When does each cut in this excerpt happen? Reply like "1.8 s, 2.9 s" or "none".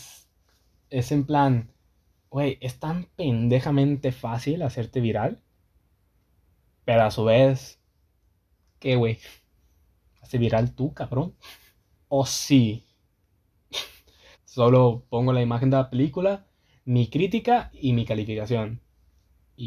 11.9 s, 14.3 s